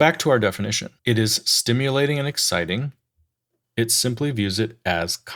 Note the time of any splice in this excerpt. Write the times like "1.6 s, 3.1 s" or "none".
1.0 s, 3.6 s

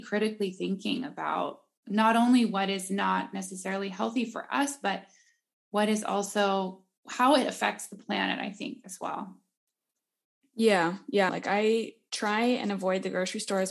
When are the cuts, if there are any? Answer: 11.3 s

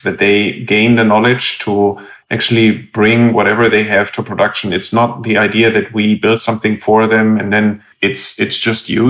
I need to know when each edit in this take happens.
none

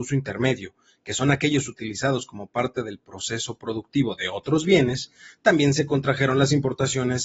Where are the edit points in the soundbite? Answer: none

